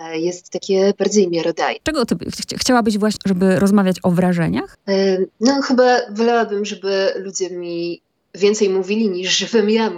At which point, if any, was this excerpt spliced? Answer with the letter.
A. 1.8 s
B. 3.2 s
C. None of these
B